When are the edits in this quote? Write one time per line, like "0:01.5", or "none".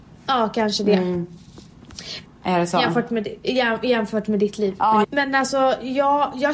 0:02.3
0:05.0